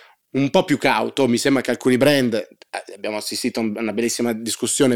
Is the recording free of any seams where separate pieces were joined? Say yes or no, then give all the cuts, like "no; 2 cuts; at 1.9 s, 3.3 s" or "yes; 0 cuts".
yes; 0 cuts